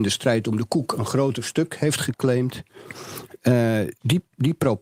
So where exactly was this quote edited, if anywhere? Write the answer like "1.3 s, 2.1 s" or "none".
none

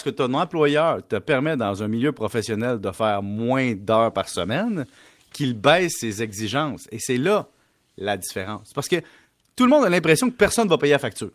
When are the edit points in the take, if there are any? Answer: none

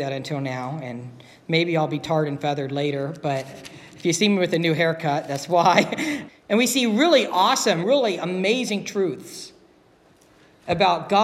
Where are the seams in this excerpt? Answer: 6.3 s, 7.8 s

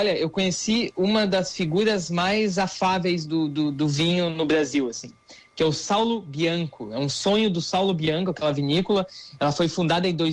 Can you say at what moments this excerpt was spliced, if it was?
none

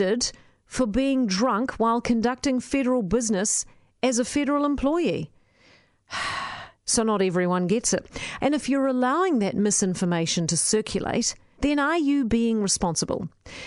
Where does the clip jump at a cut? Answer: 8.4 s, 11.6 s

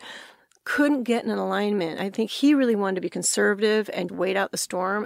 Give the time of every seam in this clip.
4.1 s

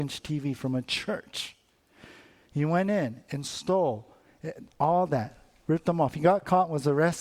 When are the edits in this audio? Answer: none

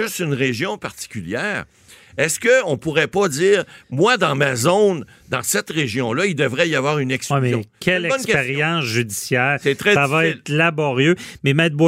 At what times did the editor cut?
none

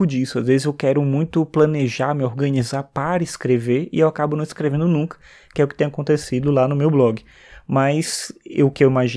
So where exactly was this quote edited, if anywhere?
none

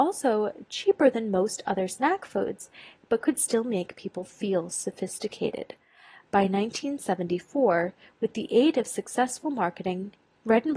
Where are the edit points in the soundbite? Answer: none

